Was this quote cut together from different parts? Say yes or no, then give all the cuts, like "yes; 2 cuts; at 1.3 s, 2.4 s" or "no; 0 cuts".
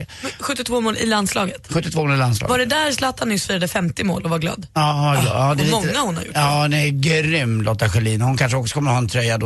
no; 0 cuts